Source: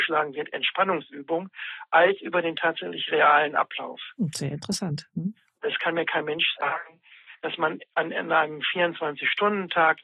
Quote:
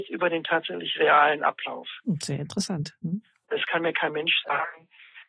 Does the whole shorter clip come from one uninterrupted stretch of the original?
yes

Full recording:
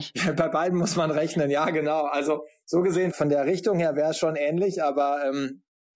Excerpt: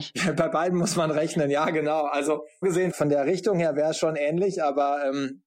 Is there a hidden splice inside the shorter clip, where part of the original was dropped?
yes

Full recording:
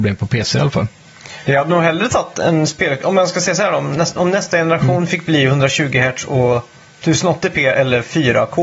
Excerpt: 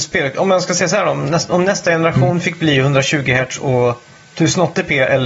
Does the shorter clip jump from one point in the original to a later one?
no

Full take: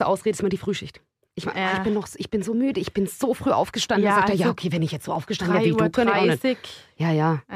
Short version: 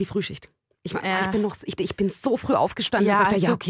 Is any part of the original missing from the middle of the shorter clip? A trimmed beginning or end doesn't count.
yes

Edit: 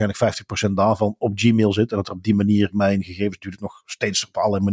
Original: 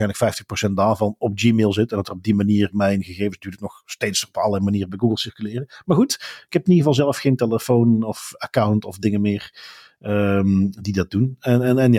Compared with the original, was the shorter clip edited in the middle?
no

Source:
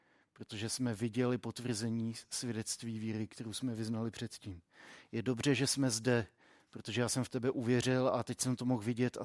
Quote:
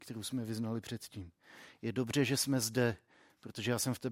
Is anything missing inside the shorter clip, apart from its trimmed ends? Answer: no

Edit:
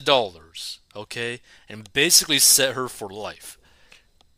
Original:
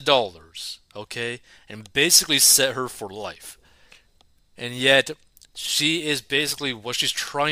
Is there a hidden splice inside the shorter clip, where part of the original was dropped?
no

